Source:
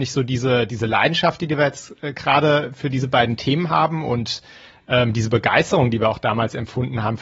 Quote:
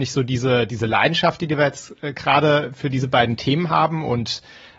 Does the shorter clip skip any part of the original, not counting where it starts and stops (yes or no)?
no